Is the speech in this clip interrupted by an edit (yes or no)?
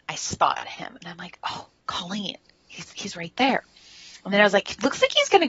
no